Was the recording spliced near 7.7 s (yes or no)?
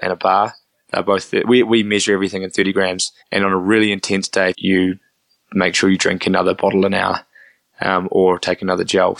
no